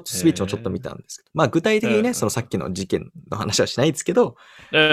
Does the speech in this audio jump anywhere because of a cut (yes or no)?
no